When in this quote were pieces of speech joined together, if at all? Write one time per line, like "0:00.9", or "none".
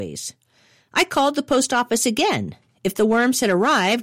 none